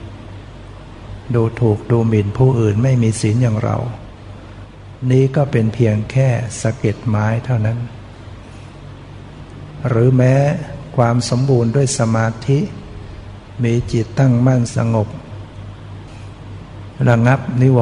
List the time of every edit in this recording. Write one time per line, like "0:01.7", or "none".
none